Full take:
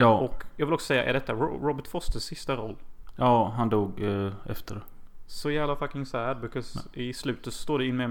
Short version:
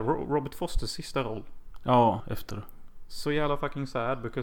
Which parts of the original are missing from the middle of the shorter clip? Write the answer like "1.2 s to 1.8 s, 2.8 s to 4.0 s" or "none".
3.5 s to 4.4 s